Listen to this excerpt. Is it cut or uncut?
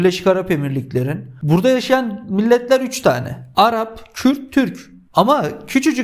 cut